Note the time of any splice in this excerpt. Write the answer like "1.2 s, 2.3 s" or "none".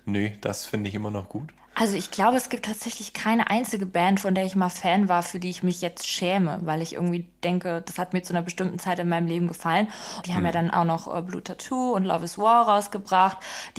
10.2 s